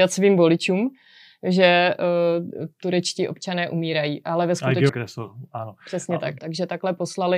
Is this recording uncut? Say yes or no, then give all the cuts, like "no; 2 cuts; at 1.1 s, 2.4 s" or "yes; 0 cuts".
no; 2 cuts; at 4.9 s, 6.4 s